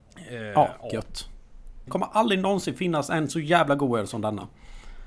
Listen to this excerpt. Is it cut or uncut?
cut